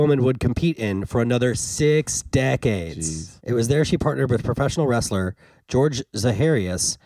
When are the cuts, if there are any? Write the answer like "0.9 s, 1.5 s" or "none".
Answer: 3.4 s